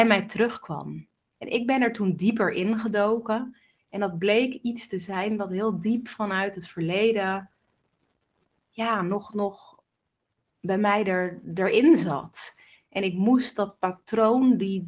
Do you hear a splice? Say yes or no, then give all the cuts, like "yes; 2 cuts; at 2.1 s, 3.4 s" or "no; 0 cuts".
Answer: no; 0 cuts